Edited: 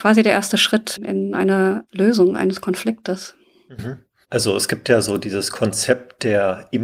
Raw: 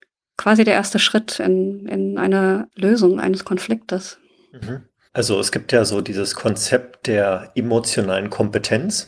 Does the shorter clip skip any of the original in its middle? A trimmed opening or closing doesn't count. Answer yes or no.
yes